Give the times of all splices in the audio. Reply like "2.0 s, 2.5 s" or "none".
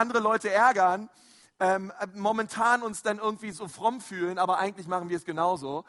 none